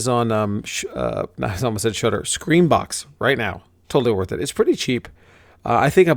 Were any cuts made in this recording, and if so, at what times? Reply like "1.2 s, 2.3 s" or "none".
3.8 s

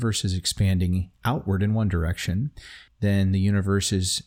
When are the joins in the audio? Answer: 2.9 s

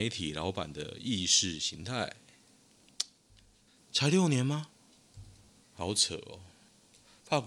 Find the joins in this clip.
3.8 s, 5.6 s

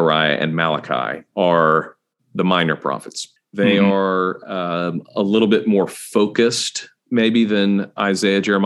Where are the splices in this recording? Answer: 3.4 s

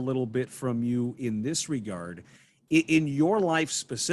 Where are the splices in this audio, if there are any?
none

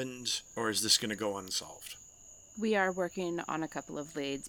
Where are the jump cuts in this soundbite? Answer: none

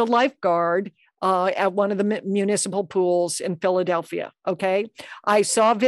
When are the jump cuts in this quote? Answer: none

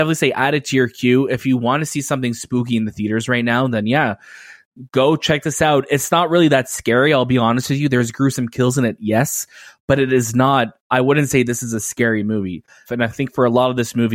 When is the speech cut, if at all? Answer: 12.9 s

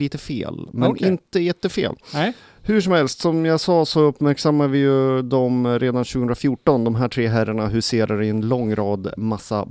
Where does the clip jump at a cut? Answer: none

